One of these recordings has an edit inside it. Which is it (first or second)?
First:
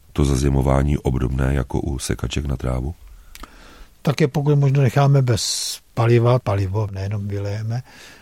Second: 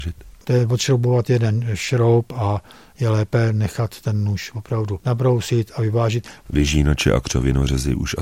second